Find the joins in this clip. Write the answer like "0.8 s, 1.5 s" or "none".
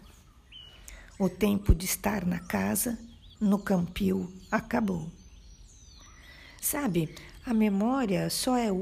3.4 s, 6.6 s